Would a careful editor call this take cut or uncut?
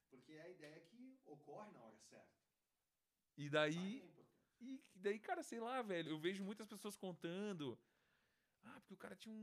cut